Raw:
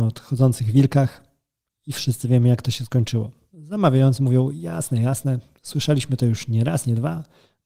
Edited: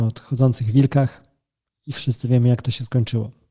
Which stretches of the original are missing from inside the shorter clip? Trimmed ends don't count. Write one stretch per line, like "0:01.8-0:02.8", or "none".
none